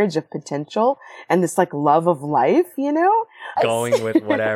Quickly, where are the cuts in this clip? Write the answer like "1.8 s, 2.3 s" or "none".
3.6 s